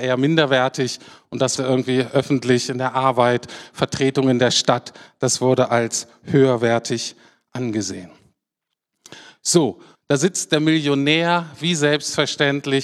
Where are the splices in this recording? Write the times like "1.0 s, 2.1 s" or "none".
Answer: 1.6 s, 9.9 s